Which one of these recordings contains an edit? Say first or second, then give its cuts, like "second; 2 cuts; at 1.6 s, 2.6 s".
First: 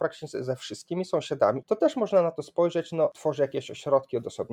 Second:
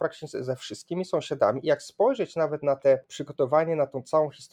first; 1 cut; at 1.6 s